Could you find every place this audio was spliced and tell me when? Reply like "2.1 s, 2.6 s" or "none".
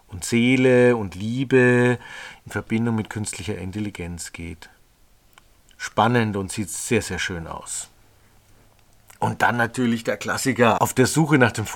10.8 s